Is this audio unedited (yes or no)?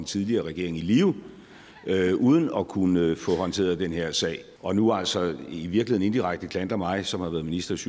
no